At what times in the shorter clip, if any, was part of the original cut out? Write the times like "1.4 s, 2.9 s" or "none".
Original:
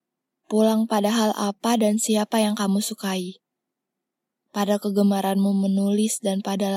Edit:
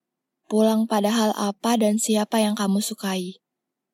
none